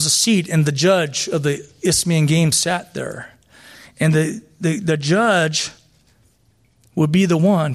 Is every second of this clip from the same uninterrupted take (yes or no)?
yes